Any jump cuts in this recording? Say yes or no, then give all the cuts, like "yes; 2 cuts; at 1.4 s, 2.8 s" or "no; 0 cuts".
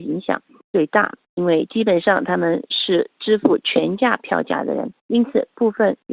yes; 1 cut; at 5.0 s